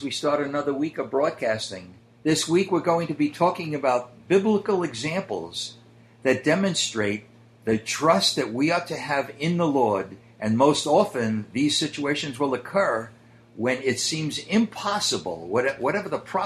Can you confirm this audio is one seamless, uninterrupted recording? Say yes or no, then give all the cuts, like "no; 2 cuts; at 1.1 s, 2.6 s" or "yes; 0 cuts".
yes; 0 cuts